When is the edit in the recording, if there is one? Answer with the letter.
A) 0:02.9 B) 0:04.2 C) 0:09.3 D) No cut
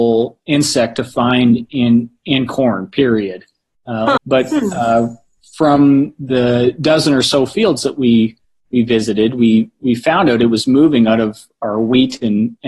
B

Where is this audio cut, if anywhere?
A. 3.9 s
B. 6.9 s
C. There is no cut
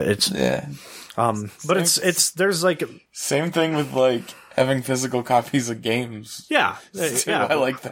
C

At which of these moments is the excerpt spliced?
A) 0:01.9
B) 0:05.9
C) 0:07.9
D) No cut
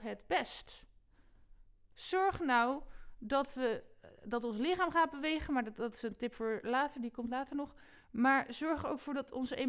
A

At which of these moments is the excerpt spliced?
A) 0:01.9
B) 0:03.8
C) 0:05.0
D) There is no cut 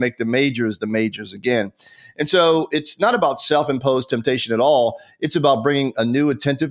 D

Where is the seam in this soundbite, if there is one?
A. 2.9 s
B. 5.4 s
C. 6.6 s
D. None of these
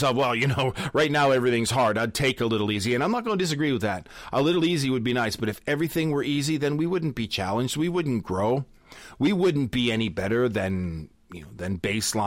D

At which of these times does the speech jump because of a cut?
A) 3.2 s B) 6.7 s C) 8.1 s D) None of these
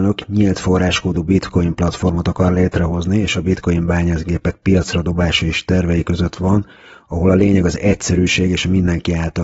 D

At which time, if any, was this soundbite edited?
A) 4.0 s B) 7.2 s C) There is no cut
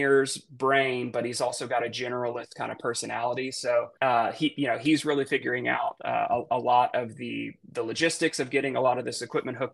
A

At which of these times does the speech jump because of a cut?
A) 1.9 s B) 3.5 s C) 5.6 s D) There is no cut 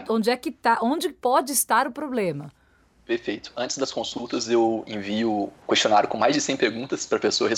C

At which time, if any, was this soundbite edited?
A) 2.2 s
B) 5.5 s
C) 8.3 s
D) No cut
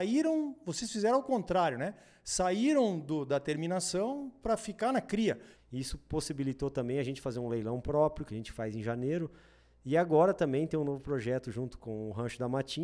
B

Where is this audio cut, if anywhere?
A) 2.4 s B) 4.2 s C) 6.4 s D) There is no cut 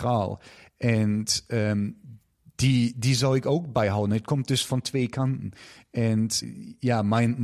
C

